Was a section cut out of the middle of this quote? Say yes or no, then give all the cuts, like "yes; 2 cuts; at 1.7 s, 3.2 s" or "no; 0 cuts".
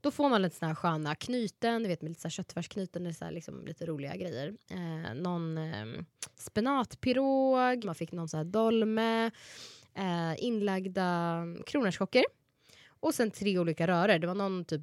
yes; 1 cut; at 7.8 s